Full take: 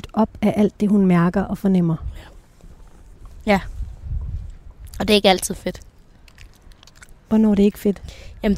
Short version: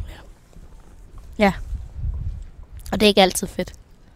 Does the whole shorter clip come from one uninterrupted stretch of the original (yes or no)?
yes